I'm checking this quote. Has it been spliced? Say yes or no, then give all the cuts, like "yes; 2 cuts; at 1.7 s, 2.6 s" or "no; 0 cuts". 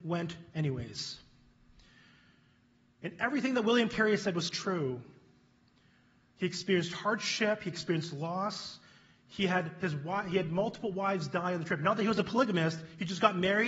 no; 0 cuts